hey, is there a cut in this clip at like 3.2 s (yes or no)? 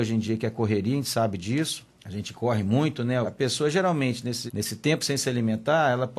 yes